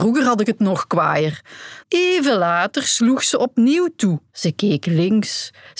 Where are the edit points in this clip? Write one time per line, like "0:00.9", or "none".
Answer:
0:01.8
0:04.3